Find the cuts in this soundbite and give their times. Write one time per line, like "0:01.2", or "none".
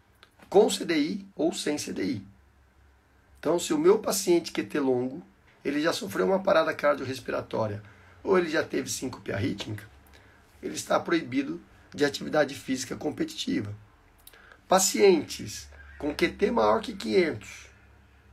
0:01.3
0:05.5
0:10.5